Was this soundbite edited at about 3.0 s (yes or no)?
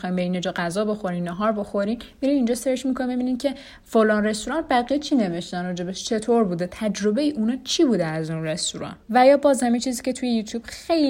no